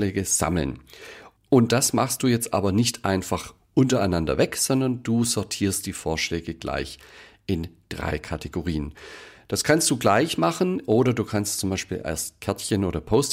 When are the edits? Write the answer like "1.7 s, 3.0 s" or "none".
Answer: none